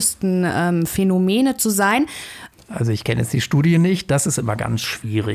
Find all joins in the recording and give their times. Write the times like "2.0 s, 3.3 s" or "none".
2.5 s